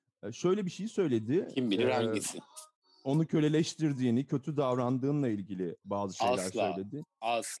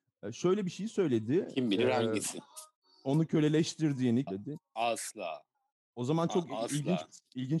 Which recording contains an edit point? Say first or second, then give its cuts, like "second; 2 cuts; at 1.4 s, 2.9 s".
second; 1 cut; at 4.3 s